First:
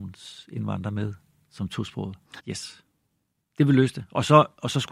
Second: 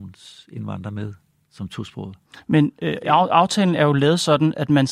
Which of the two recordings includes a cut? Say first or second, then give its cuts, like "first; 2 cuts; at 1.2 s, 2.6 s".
first; 1 cut; at 2.4 s